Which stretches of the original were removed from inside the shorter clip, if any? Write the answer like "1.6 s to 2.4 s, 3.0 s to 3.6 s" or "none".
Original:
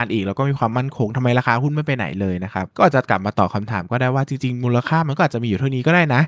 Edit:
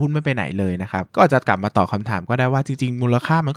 none